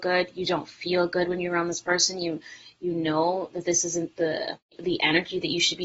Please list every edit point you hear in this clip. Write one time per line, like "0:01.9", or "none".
none